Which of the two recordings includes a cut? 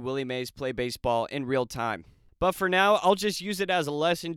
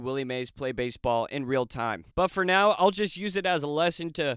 second; 1 cut; at 2.1 s

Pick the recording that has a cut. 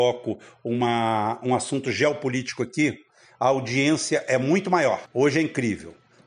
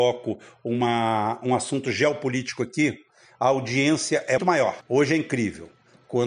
second; 1 cut; at 4.4 s

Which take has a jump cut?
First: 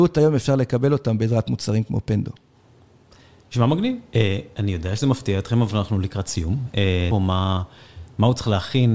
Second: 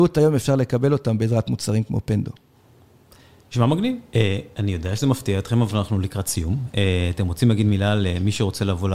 first; 1 cut; at 7.1 s

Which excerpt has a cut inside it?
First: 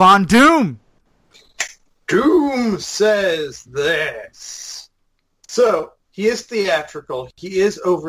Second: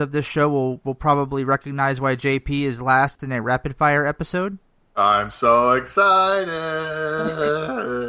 first; 1 cut; at 6.0 s

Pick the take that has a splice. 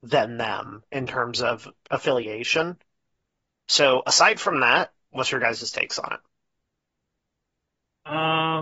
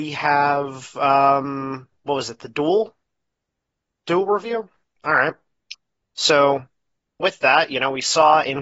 first; 2 cuts; at 3.5 s, 5.1 s

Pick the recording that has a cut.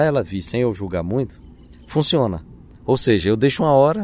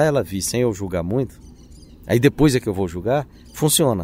first; 1 cut; at 1.7 s

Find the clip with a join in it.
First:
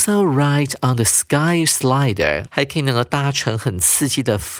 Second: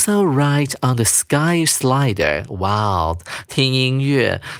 first; 1 cut; at 2.5 s

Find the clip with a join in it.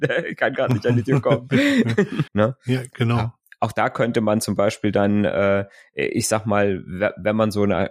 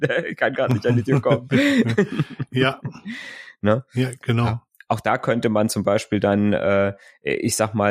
first; 1 cut; at 2.3 s

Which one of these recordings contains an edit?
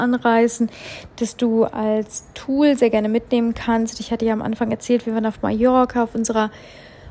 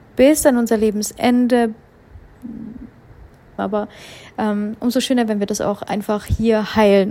second; 1 cut; at 3.6 s

